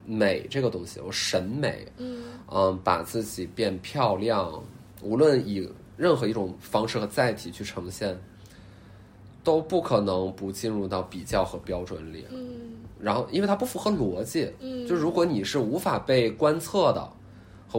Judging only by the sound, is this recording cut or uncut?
uncut